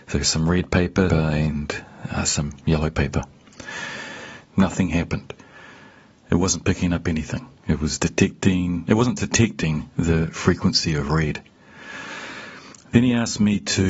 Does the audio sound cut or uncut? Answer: cut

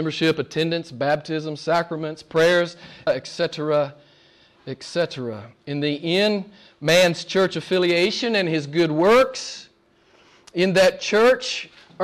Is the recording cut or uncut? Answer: cut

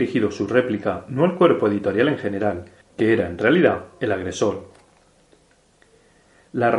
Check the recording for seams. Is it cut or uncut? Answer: cut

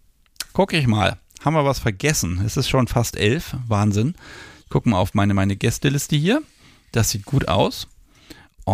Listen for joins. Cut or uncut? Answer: uncut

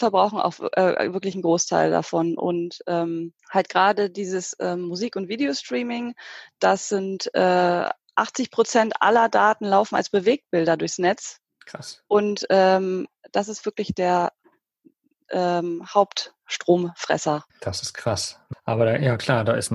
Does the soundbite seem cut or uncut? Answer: cut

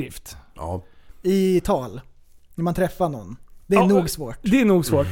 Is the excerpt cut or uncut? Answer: uncut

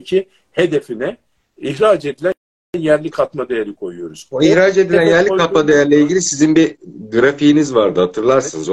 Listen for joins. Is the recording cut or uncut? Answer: uncut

